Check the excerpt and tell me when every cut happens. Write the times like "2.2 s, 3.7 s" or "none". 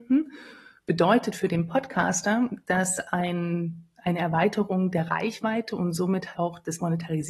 6.3 s

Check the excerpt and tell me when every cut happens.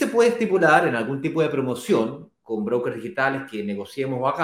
none

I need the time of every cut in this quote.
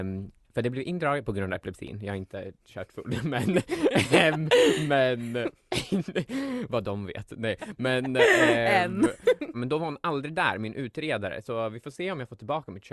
9.5 s

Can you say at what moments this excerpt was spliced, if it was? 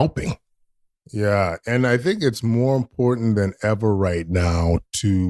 0.9 s

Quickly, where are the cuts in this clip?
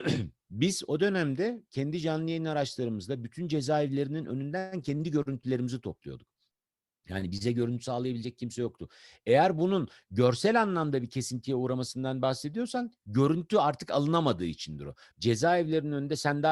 15.1 s

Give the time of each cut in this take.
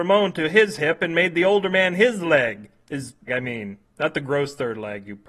3.3 s

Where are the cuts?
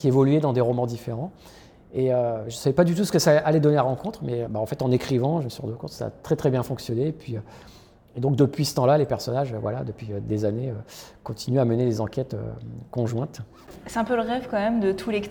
4.4 s

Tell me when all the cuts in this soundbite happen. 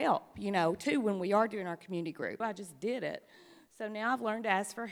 2.4 s

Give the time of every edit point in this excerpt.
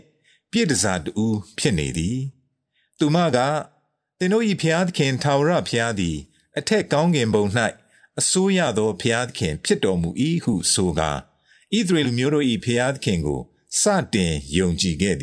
12.0 s

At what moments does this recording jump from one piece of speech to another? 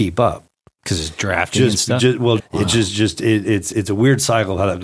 2.4 s, 3.7 s

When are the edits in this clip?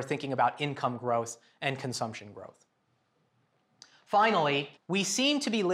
4.8 s

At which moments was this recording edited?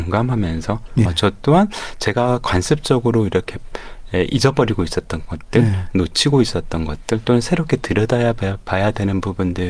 1.1 s

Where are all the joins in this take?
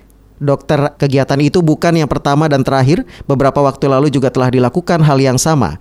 1.0 s

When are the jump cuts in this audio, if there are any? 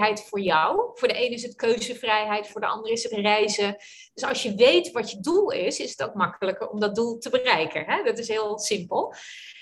2.5 s

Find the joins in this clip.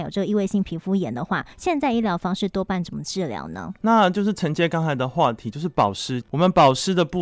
1.5 s, 6.2 s

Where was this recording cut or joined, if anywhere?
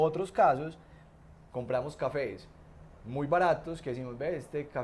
none

